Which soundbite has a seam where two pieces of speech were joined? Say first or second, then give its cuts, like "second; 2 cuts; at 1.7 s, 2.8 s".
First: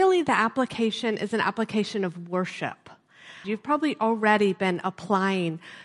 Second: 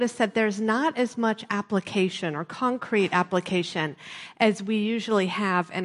first; 1 cut; at 3.4 s